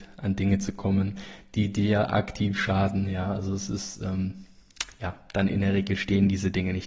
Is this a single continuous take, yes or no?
yes